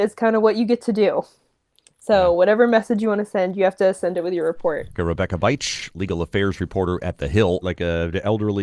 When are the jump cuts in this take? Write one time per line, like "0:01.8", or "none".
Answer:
0:05.0
0:07.6